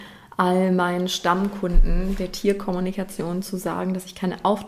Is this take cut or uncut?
uncut